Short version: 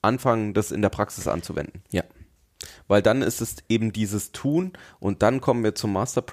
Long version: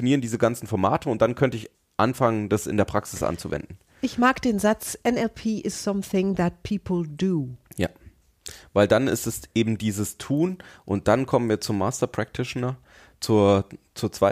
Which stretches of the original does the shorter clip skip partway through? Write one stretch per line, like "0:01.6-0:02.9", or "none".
0:03.8-0:07.7